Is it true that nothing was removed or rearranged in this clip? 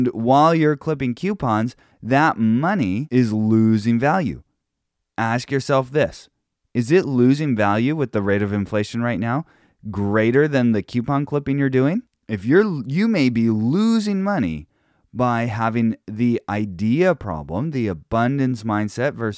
yes; 0 cuts

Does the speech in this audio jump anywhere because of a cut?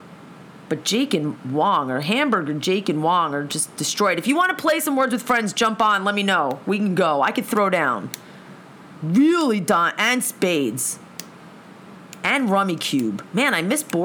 yes; 1 cut; at 8.9 s

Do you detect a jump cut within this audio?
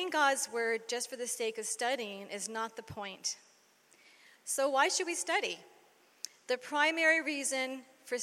yes; 1 cut; at 4.4 s

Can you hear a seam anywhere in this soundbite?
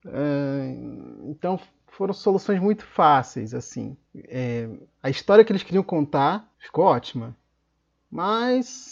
yes; 2 cuts; at 4.1 s, 6.5 s

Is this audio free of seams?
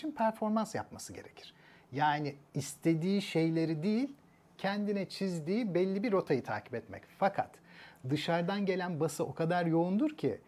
yes; 0 cuts

